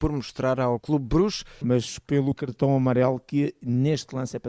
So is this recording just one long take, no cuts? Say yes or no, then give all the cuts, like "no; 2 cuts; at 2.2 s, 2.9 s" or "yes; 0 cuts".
no; 1 cut; at 1.6 s